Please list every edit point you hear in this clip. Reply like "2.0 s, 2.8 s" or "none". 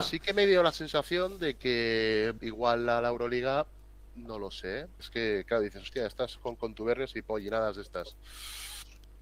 2.4 s, 5.0 s